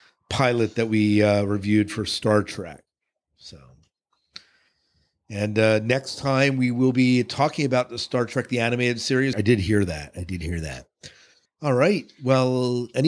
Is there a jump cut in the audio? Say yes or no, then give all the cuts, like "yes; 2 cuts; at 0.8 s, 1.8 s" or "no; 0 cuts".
yes; 2 cuts; at 9.3 s, 11.5 s